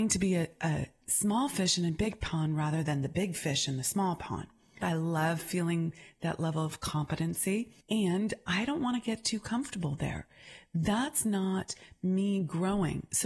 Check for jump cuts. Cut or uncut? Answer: cut